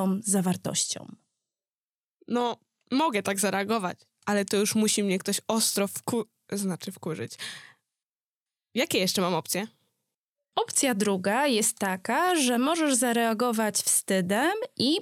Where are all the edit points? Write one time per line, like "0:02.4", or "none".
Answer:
none